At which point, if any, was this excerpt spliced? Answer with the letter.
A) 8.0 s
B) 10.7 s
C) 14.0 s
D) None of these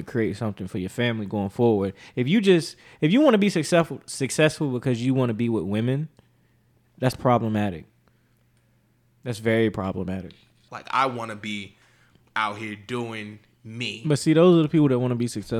B